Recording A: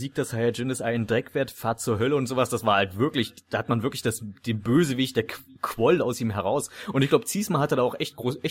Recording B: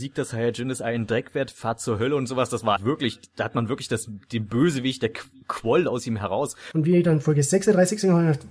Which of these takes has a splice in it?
B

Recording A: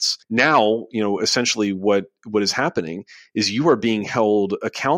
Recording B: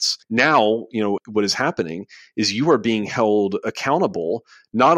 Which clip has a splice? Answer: B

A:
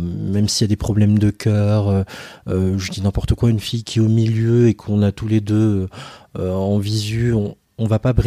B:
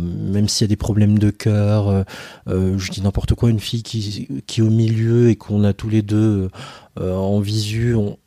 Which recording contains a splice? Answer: A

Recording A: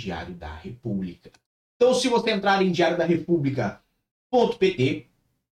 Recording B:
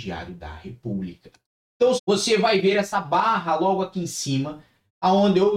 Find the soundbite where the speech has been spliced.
B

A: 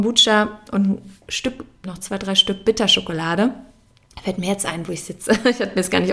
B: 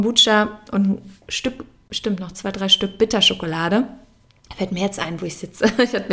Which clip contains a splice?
A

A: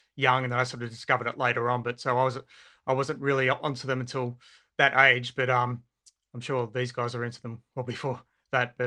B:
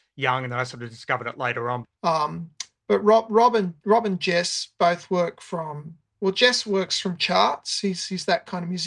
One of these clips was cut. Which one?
B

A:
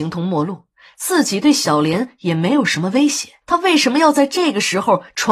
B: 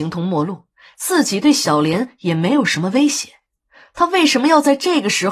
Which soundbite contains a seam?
A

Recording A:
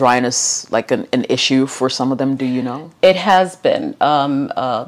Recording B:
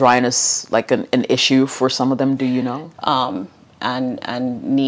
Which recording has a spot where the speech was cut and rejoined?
B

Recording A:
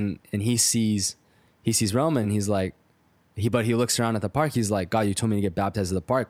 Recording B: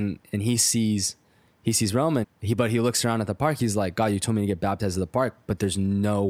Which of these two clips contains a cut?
B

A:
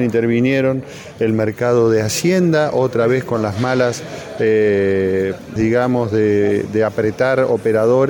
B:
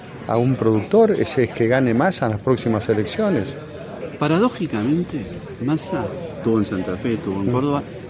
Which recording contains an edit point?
A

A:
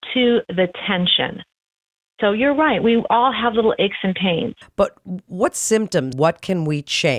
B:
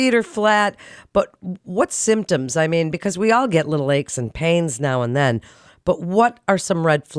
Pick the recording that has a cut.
A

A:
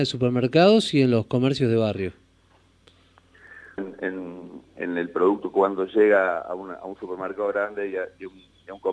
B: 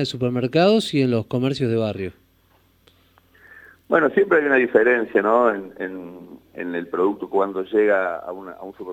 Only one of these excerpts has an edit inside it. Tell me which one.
A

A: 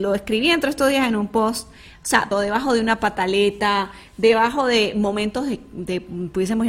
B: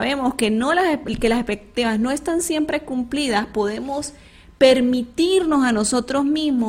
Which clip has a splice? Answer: A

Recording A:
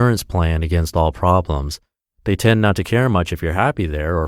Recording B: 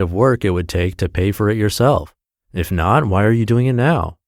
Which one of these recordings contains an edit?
B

